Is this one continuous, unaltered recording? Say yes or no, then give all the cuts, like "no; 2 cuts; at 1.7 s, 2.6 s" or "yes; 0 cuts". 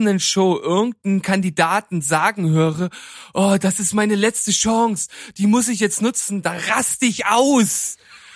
yes; 0 cuts